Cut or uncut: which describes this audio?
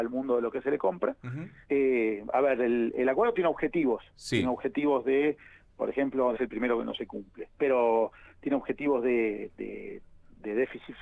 cut